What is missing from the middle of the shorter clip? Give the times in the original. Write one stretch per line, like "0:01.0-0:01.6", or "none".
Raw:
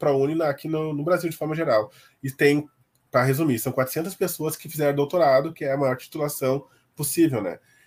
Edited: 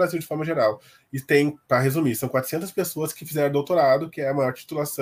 0:02.7-0:03.1